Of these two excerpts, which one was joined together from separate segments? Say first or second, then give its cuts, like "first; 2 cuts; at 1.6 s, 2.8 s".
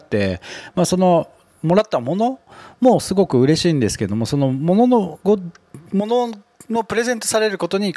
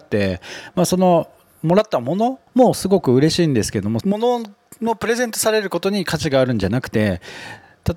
second; 2 cuts; at 2.5 s, 4.0 s